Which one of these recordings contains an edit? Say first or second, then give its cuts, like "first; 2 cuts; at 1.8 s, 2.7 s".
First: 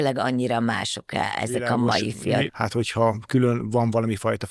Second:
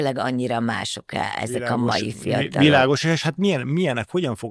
first; 1 cut; at 2.5 s